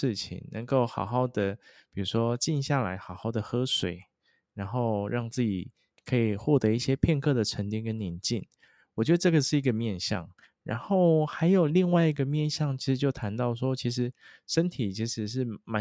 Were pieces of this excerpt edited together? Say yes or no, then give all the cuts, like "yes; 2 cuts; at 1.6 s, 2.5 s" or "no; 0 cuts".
no; 0 cuts